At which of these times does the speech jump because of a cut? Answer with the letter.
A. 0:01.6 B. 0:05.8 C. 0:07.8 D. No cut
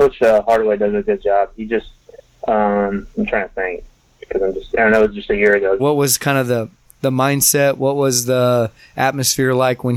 B